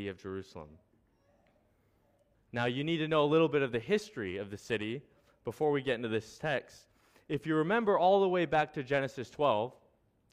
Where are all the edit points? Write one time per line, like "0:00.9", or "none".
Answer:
0:02.3